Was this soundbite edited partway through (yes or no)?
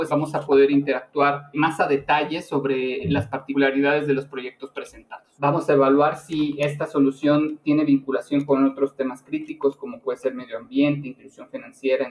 yes